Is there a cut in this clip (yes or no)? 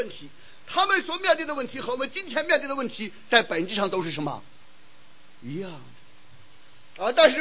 no